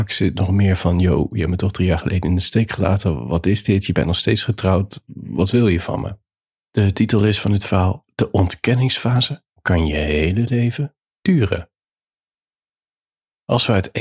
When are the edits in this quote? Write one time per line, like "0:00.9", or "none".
none